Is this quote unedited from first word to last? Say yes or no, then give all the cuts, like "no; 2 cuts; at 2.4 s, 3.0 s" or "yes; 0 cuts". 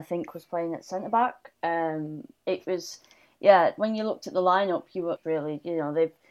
no; 1 cut; at 5.2 s